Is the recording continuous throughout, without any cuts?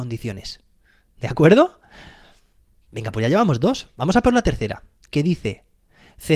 yes; 0 cuts

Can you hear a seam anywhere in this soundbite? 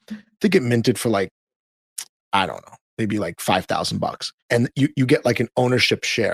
yes; 1 cut; at 4.4 s

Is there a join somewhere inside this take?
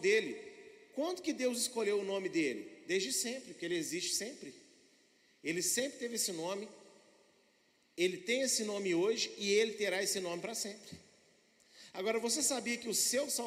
no; 0 cuts

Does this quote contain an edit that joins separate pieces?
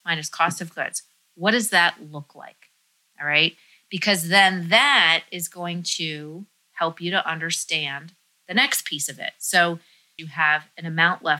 yes; 1 cut; at 10.2 s

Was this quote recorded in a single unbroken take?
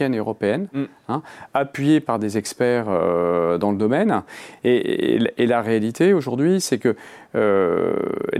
yes; 0 cuts

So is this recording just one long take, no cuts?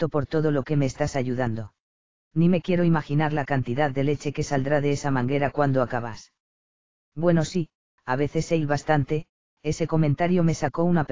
no; 1 cut; at 2.2 s

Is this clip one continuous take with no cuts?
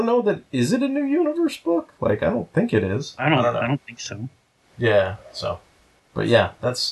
yes; 0 cuts

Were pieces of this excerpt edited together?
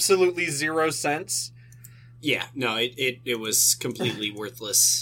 no; 0 cuts

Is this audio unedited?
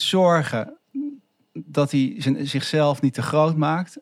yes; 0 cuts

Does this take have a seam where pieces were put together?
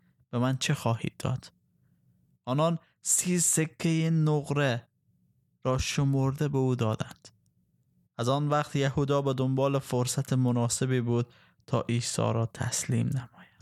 no; 0 cuts

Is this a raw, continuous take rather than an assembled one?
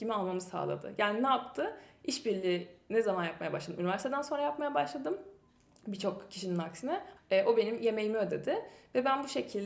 no; 1 cut; at 7.2 s

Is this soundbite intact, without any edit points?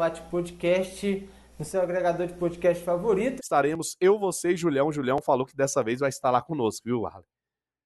no; 1 cut; at 3.4 s

